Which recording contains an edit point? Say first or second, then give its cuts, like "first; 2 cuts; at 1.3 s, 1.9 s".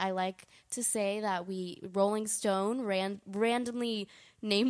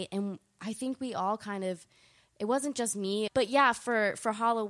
second; 1 cut; at 3.3 s